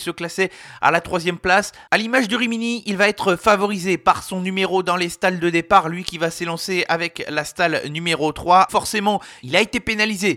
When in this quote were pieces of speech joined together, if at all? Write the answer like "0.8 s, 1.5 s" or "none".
8.7 s